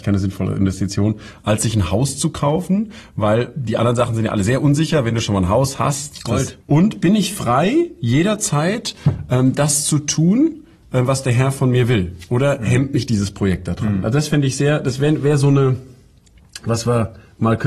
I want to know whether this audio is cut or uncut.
cut